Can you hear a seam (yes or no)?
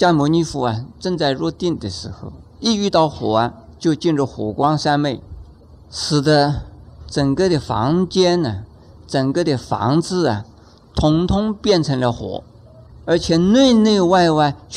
no